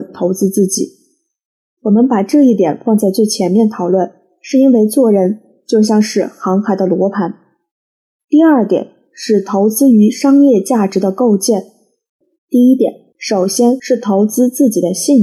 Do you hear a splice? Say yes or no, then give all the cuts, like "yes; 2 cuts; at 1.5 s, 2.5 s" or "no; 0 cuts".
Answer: yes; 2 cuts; at 1.8 s, 12.3 s